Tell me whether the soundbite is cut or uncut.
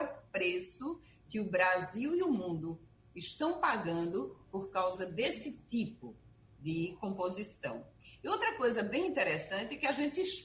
uncut